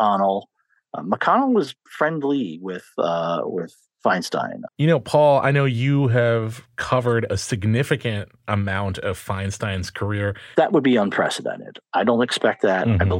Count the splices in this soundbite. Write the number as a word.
two